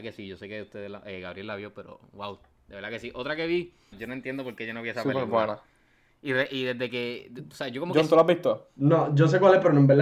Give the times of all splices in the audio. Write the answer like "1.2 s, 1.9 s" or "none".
3.9 s